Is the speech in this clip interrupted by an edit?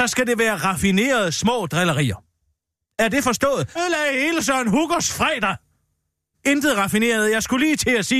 yes; 2 cuts; at 3.8 s, 6.3 s

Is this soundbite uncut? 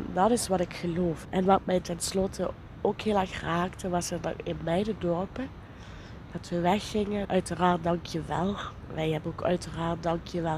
no; 2 cuts; at 1.2 s, 7.2 s

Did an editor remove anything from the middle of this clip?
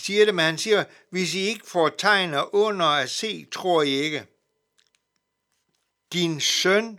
yes; 1 cut; at 6.1 s

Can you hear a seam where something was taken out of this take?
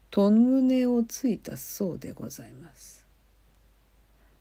no; 0 cuts

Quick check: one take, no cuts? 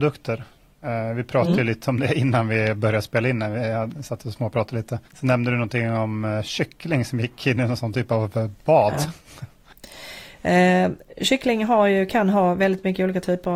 no; 1 cut; at 5.1 s

